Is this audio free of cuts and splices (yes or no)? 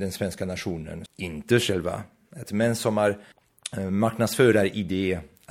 no